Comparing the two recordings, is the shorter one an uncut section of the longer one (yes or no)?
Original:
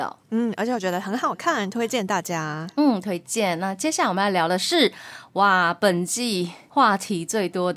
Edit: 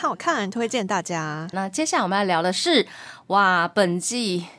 no